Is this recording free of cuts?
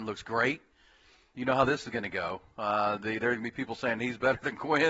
yes; 0 cuts

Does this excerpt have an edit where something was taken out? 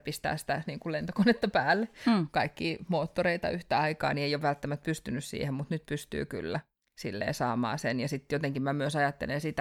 no; 0 cuts

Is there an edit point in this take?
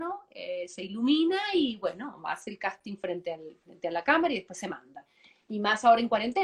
no; 0 cuts

